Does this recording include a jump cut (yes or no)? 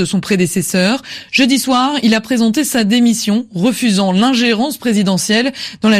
no